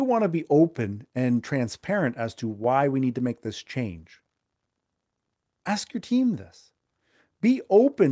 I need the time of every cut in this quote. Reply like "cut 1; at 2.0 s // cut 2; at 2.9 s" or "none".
cut 1; at 5.6 s